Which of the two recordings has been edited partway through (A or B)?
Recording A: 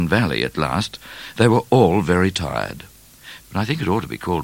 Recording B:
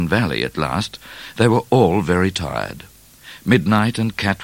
A